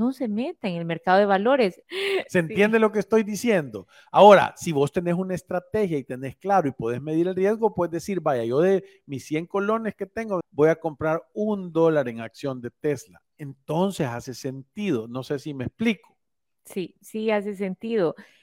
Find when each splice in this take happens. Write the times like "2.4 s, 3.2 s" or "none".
1.8 s, 10.4 s